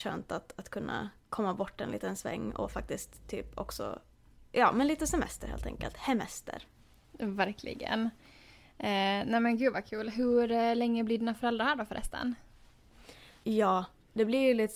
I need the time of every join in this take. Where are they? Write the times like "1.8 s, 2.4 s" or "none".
13.4 s